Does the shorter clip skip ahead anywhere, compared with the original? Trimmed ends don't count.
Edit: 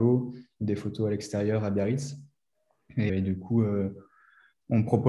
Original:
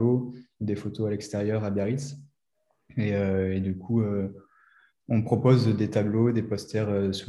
yes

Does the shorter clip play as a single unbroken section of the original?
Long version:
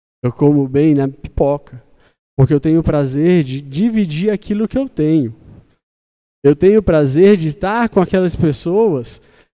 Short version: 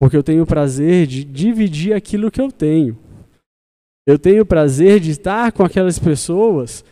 yes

